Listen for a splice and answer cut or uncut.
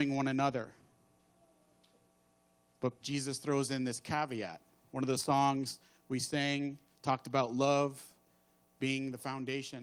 cut